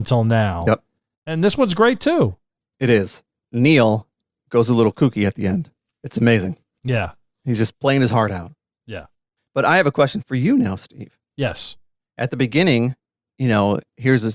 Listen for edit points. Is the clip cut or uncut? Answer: cut